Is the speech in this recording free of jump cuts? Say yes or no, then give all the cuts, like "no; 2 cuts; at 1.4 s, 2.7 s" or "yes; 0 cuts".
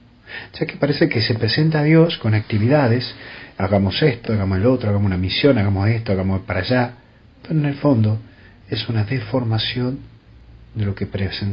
yes; 0 cuts